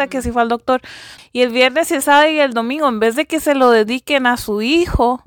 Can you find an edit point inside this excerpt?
yes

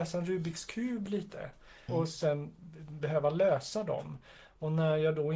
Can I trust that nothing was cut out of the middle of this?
no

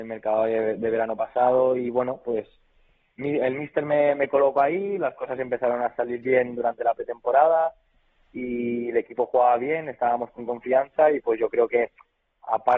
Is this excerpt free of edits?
yes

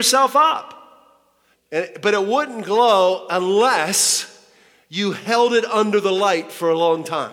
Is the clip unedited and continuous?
no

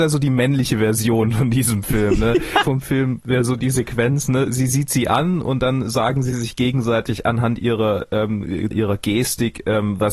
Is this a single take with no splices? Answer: no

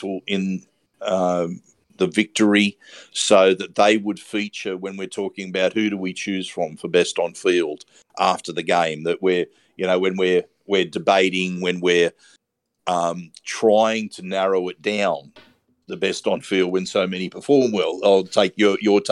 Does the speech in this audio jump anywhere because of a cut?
no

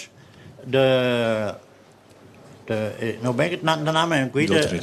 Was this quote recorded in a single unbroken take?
yes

